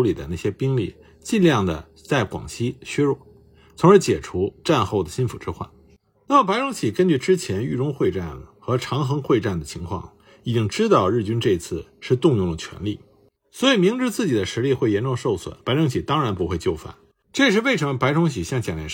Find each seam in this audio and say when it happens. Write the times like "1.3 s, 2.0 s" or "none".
13.4 s, 15.6 s, 17.2 s